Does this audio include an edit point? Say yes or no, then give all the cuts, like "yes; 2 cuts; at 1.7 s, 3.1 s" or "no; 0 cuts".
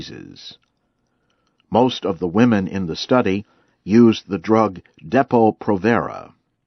no; 0 cuts